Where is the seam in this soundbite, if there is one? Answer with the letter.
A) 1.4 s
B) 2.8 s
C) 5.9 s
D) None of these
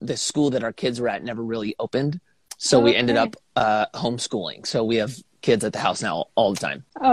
D